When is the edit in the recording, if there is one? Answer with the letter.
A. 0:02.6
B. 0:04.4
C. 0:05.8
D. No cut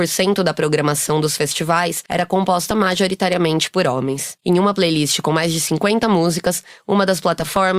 B